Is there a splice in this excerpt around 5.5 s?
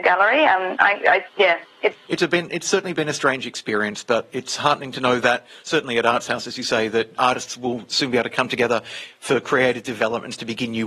no; 2 cuts; at 2.0 s, 7.2 s

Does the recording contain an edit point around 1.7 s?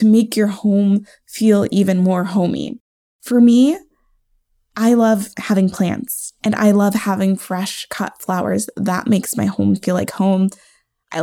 no; 0 cuts

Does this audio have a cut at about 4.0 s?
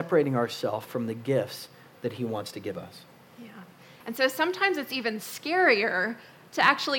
yes; 1 cut; at 4.0 s

